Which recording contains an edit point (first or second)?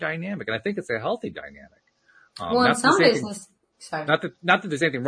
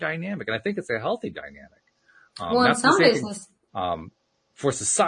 second